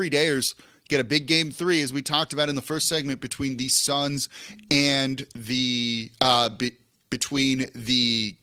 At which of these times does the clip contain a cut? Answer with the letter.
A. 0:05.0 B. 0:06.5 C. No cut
C